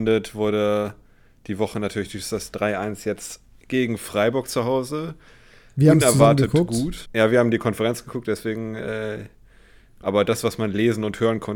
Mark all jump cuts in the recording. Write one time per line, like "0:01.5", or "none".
0:07.1